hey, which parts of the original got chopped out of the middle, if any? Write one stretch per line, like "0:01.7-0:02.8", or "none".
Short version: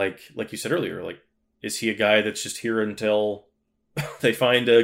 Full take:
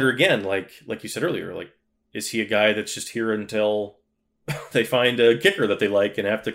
none